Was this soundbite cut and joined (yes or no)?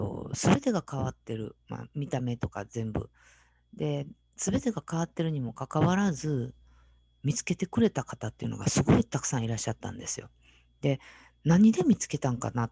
no